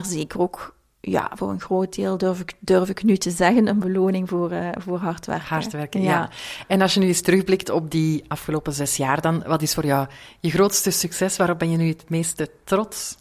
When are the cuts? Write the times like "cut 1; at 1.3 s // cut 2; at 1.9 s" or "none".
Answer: none